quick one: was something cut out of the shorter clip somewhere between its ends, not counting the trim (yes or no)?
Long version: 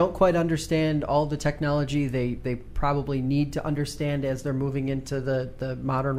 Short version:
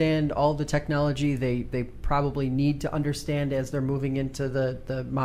no